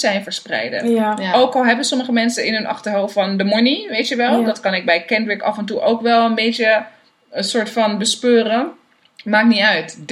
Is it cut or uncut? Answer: uncut